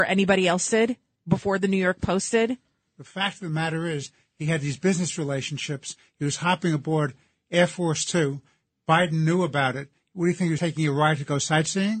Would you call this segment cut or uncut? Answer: cut